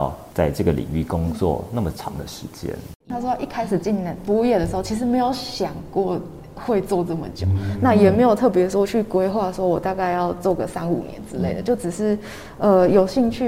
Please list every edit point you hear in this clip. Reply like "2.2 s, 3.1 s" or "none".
3.0 s